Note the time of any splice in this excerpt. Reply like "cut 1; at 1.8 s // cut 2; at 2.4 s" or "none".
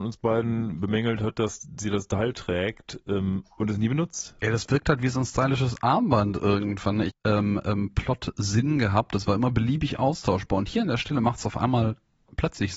cut 1; at 4.4 s // cut 2; at 7.1 s